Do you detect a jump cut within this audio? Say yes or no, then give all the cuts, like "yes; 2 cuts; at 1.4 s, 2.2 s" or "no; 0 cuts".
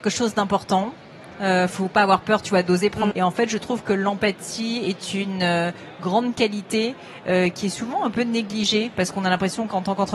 yes; 2 cuts; at 1.7 s, 3.1 s